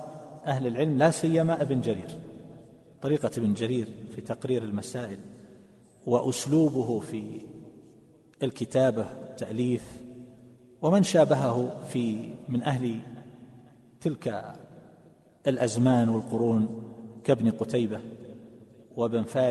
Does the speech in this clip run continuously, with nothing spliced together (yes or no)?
yes